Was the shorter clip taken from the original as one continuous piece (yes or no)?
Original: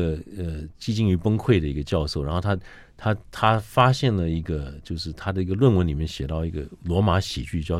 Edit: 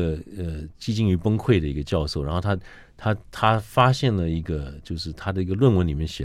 yes